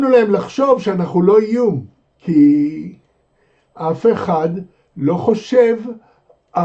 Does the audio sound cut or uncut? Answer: cut